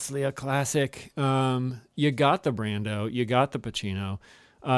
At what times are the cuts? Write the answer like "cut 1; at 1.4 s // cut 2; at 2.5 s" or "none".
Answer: none